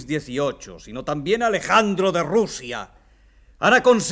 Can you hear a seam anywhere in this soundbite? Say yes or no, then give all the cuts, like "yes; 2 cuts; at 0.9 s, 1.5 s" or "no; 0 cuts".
no; 0 cuts